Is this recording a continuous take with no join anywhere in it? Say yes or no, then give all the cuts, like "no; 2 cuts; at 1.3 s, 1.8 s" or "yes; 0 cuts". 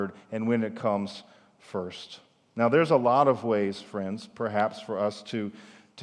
yes; 0 cuts